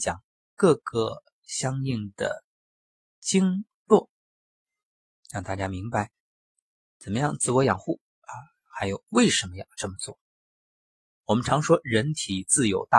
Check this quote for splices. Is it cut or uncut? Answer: cut